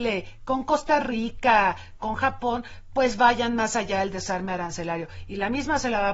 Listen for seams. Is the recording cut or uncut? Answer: cut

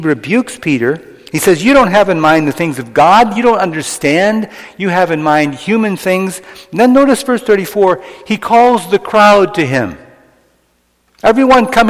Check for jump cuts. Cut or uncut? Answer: uncut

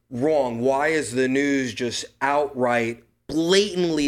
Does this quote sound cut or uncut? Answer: uncut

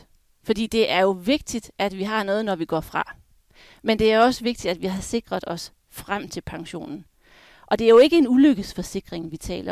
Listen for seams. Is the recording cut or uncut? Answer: uncut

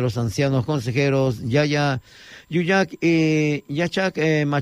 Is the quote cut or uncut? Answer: uncut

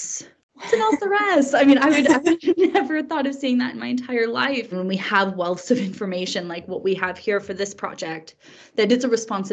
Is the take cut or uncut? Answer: cut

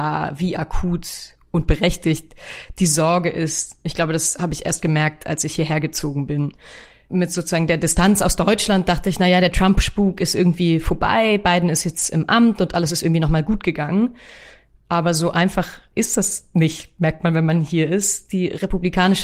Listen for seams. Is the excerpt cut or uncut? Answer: uncut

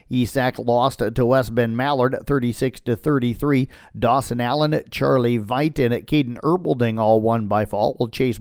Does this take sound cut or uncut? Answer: uncut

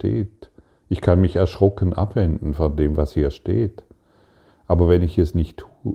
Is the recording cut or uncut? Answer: uncut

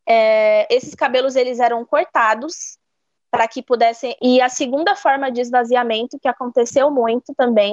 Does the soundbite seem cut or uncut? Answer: cut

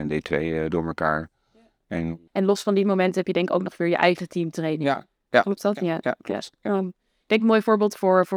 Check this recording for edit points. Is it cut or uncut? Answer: cut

